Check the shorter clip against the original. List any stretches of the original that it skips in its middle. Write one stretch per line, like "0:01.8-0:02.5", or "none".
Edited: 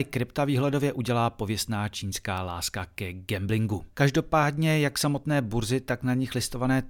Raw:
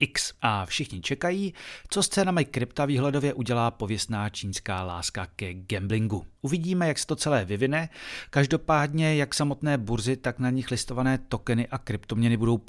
0:06.3-0:08.3